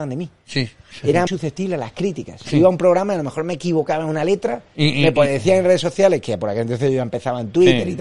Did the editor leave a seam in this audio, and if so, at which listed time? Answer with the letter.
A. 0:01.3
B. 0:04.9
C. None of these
A